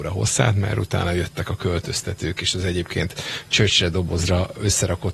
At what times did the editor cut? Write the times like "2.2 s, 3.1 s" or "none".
none